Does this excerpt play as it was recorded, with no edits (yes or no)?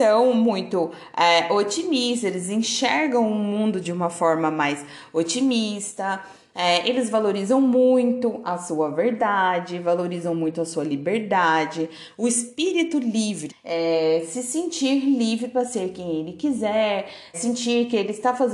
no